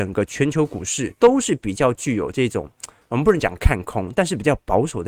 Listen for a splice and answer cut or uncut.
cut